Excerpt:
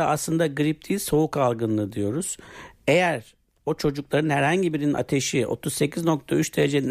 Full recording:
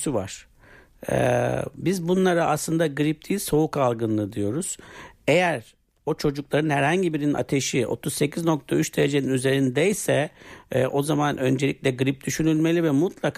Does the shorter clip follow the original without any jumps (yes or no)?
yes